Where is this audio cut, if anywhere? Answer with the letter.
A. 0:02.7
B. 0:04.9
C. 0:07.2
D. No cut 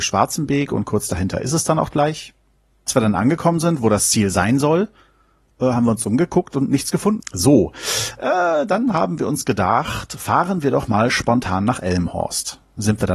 C